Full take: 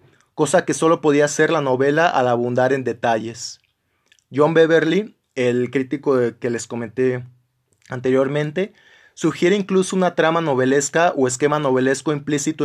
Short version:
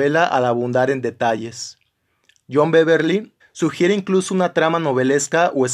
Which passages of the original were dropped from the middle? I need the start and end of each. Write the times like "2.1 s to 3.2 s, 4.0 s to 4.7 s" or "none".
5.2 s to 9.0 s